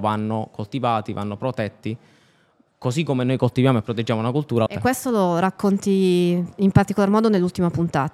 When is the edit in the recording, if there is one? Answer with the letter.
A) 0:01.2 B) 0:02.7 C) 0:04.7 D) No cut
C